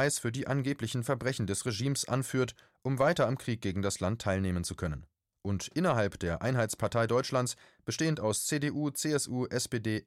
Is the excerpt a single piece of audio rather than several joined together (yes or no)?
yes